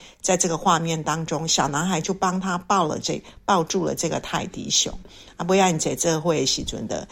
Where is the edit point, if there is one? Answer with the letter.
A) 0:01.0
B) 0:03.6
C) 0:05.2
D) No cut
D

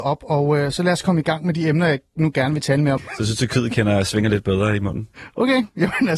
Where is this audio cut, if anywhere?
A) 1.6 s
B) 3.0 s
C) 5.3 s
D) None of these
B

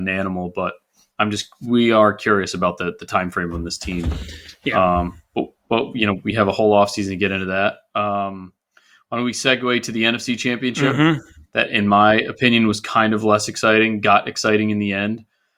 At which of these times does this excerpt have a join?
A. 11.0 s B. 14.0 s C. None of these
C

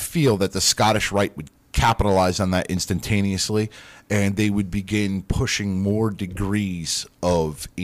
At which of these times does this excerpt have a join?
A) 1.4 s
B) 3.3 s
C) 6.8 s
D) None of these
D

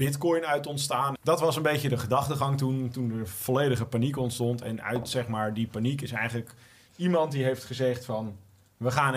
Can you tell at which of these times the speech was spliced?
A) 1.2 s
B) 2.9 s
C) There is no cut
A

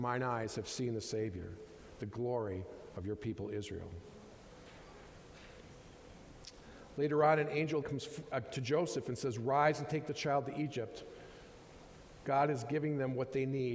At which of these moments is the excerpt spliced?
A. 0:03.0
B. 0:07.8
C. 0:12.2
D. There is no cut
B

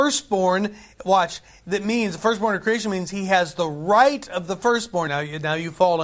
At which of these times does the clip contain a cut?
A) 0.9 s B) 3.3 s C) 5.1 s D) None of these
C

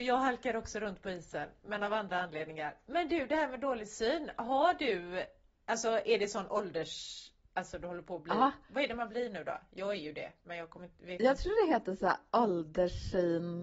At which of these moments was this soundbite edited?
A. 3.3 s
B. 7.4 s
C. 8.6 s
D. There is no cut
D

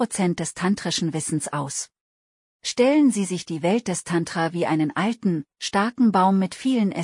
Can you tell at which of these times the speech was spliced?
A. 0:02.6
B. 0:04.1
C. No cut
A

